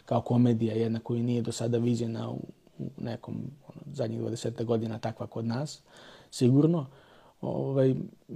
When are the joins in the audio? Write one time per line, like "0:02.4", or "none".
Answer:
none